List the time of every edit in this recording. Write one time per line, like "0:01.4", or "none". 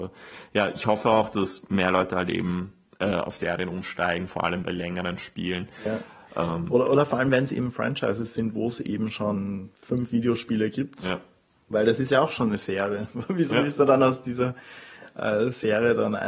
0:09.7